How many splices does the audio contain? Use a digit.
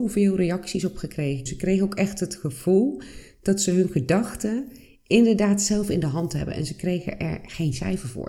1